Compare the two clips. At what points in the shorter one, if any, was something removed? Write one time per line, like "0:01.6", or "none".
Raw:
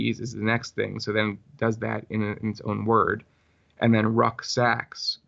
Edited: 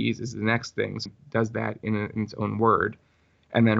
0:01.1